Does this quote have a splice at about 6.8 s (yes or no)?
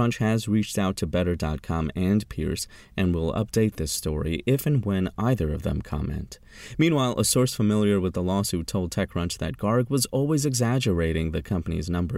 no